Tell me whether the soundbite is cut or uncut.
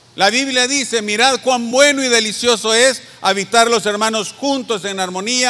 uncut